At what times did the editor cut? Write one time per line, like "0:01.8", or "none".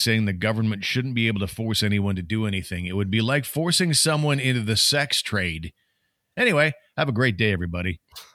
0:06.3